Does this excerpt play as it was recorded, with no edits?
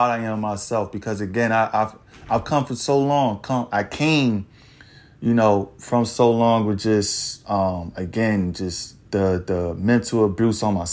no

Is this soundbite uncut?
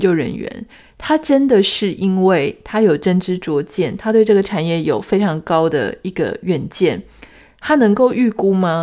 yes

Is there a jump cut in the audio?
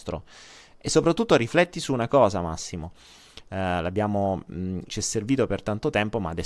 yes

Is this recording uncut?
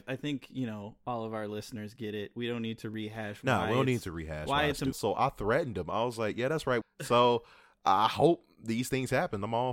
no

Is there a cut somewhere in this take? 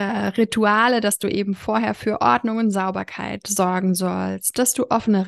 no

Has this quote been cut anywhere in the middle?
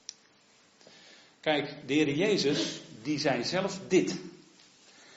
no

